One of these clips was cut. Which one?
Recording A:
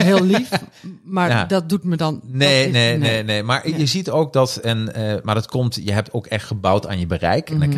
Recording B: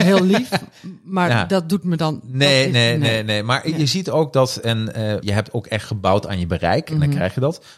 B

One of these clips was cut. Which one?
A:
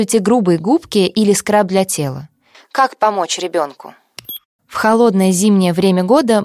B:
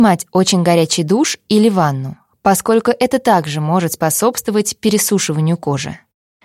A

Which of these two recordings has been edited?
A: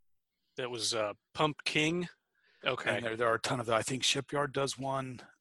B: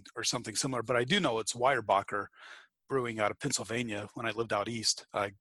A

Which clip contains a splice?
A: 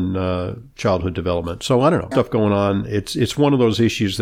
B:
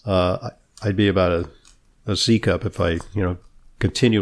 A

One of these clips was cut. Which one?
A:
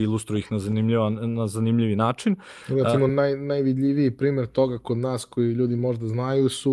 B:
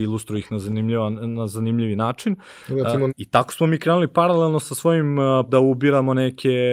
B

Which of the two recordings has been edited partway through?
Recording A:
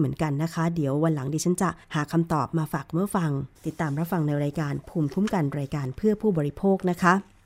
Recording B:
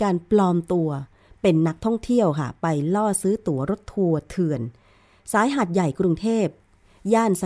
A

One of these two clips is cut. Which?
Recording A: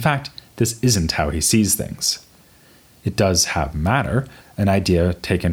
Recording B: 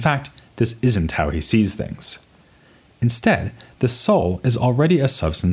A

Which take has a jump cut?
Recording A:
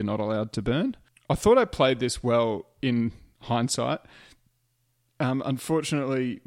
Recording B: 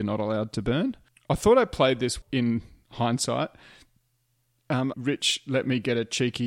B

